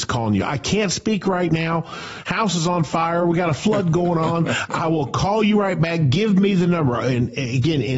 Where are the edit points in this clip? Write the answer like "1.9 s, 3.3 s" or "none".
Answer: none